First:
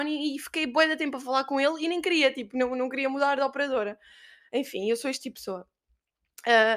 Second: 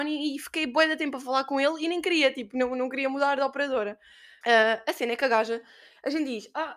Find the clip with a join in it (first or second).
second